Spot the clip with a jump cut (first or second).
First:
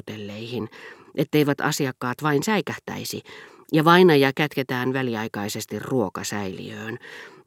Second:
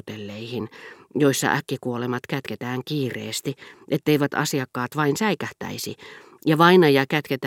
first